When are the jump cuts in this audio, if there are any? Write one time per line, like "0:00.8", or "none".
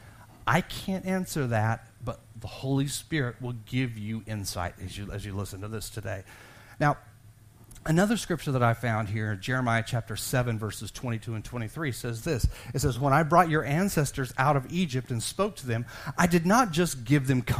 none